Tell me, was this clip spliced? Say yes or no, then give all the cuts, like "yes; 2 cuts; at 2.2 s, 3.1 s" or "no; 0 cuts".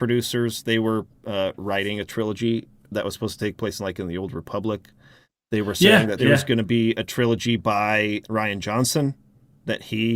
yes; 2 cuts; at 6.2 s, 8.2 s